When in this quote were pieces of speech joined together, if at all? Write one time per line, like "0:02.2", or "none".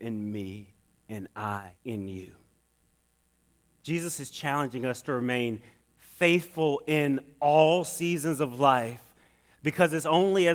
0:01.8